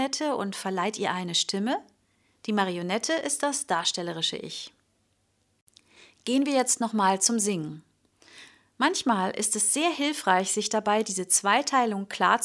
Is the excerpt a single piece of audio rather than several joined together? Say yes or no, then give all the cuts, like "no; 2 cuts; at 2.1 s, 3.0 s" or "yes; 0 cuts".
yes; 0 cuts